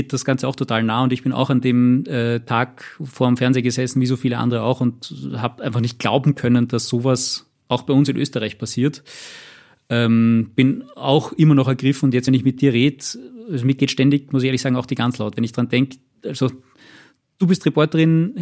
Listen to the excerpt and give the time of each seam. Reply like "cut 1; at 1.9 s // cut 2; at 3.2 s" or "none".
none